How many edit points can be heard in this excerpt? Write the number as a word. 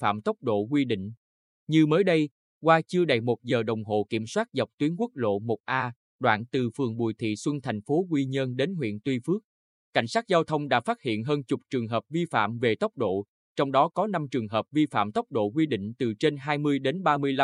zero